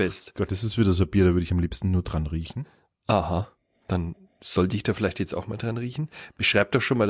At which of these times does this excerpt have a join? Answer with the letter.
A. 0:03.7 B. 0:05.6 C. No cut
C